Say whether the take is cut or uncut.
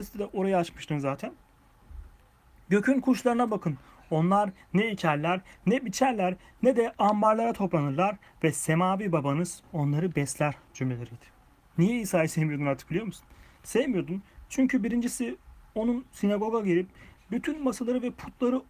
cut